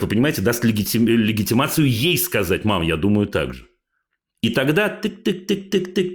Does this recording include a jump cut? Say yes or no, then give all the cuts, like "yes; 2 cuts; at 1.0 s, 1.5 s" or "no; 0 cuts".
no; 0 cuts